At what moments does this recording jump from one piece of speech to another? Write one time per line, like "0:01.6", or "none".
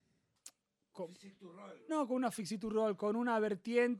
0:01.9